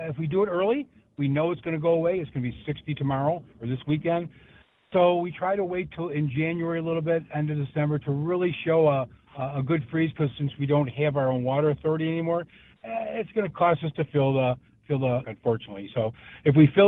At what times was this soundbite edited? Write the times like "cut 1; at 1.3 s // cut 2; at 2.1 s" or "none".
cut 1; at 15.2 s